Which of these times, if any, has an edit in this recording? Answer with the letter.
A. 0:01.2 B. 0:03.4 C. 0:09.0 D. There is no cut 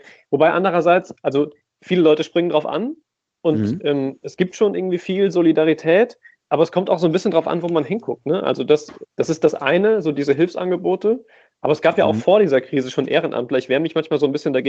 C